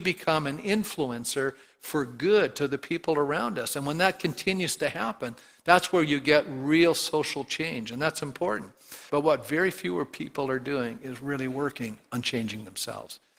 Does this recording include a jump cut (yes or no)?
yes